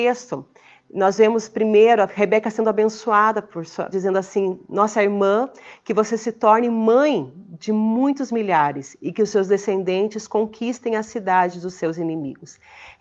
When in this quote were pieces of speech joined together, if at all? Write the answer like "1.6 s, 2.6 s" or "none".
3.9 s